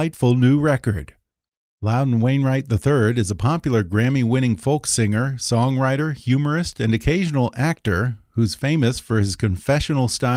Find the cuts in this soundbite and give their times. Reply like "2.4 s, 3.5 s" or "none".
none